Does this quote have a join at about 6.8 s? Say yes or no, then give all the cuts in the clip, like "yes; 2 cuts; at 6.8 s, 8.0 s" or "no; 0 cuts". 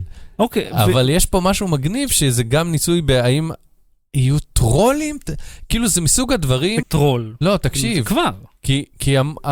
yes; 1 cut; at 6.8 s